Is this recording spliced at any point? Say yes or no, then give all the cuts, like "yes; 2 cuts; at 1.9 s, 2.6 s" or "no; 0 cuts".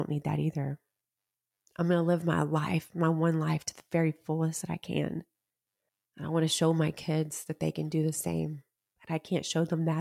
no; 0 cuts